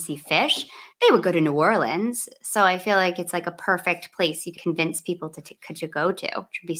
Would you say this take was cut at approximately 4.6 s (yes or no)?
yes